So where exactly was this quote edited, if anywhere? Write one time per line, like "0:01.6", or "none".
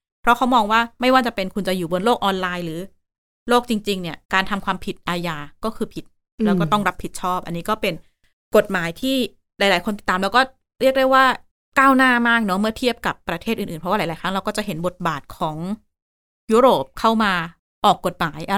0:04.2